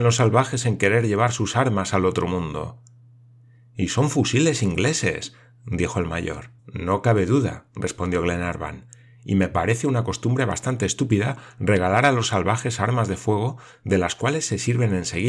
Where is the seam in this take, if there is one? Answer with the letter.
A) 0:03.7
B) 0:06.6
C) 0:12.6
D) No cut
B